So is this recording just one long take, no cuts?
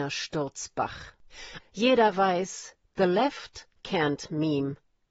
no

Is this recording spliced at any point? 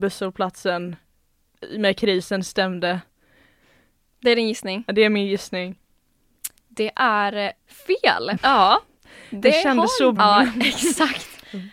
yes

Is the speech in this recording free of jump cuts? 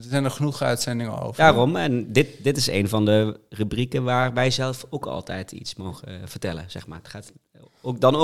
yes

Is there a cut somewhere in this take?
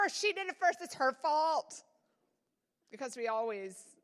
no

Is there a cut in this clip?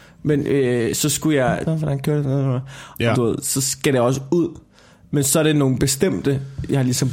yes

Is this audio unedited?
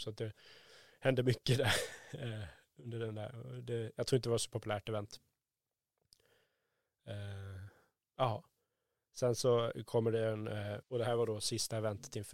no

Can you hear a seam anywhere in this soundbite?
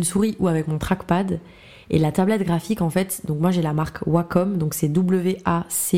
no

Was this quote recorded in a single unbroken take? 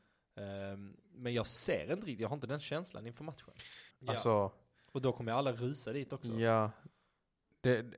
no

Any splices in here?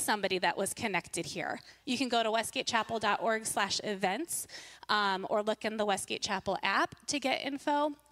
yes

